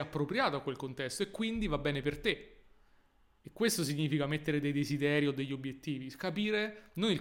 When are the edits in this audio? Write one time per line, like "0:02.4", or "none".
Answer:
none